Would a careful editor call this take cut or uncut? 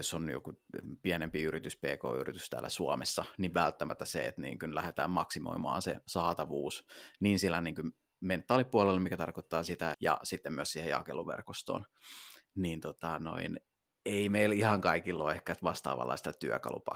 cut